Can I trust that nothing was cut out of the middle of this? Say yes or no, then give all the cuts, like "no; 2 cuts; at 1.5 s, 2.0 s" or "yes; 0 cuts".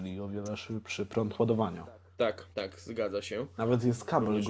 no; 1 cut; at 2.5 s